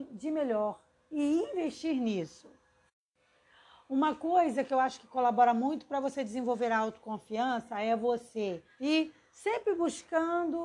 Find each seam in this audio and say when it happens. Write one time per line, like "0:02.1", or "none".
0:08.8